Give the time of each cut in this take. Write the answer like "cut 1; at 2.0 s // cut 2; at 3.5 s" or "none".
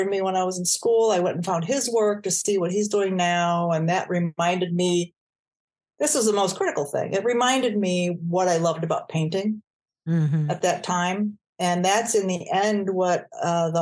none